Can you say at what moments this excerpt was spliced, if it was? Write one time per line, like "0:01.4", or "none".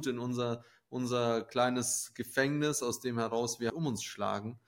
0:03.7